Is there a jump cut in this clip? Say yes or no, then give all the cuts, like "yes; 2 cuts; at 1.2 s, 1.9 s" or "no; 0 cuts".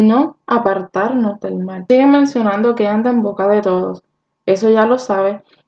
no; 0 cuts